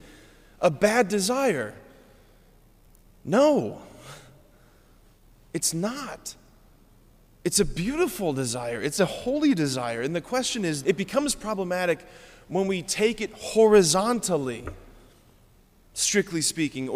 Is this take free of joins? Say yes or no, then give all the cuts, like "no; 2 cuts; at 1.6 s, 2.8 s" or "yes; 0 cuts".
no; 1 cut; at 10.8 s